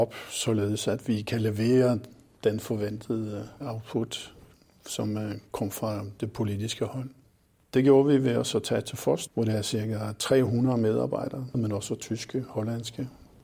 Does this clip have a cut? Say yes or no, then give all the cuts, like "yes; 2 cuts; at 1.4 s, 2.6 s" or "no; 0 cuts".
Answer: yes; 1 cut; at 11.5 s